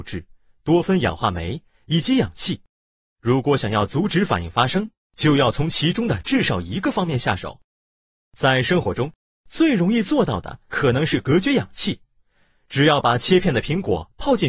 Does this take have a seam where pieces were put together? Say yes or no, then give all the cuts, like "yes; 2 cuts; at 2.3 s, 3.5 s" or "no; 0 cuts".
no; 0 cuts